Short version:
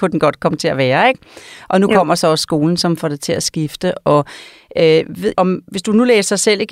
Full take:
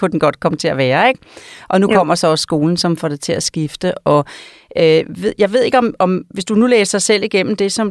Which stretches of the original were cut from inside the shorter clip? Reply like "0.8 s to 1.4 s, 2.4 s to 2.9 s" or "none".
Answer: 5.3 s to 6.0 s